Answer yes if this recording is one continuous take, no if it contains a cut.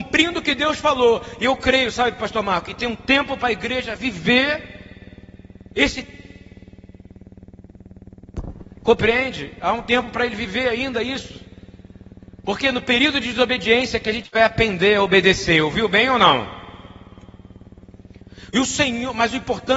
yes